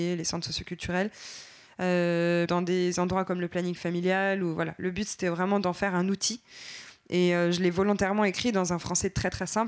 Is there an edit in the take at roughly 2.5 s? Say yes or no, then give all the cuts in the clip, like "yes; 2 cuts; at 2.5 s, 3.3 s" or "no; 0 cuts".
yes; 1 cut; at 2.5 s